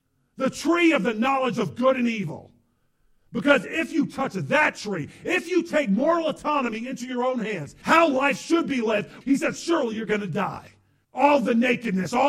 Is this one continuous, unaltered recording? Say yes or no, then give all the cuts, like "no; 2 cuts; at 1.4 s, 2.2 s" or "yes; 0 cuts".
no; 3 cuts; at 7.8 s, 9.2 s, 11.0 s